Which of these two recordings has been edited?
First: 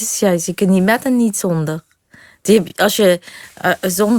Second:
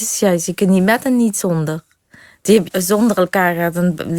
second; 1 cut; at 2.7 s

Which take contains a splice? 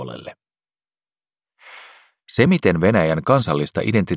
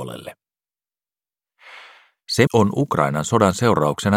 second; 1 cut; at 2.5 s

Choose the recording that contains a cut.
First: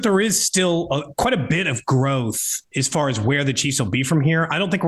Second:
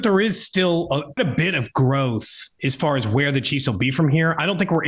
second; 1 cut; at 1.2 s

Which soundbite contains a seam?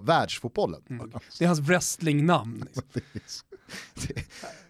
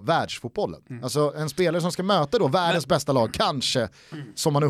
first; 1 cut; at 1.0 s

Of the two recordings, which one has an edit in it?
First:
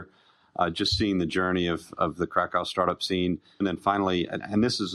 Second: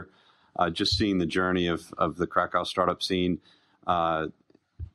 first; 1 cut; at 3.6 s

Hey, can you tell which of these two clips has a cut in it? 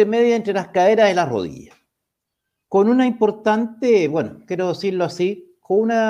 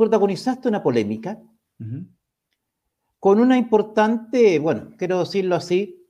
first; 1 cut; at 2.6 s

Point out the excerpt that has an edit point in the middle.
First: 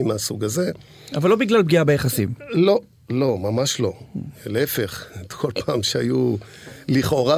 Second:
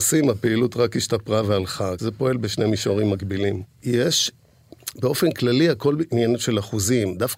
second; 2 cuts; at 2.0 s, 3.6 s

